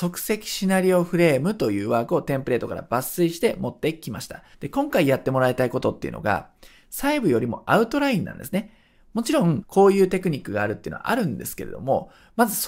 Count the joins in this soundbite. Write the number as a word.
two